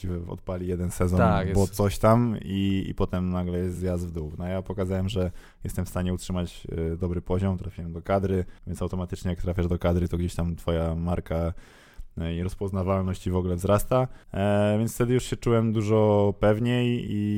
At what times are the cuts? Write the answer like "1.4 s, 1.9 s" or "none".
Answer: 8.6 s, 14.2 s